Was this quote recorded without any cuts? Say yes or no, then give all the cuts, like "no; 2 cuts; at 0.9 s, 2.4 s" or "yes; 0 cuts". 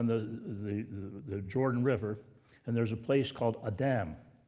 yes; 0 cuts